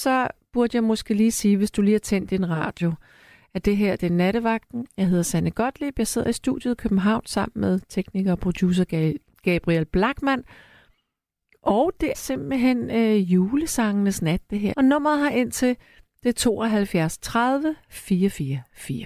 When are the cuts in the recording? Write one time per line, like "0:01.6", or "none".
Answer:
0:12.1
0:14.7